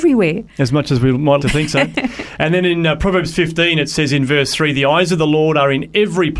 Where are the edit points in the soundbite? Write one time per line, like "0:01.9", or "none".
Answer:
0:01.4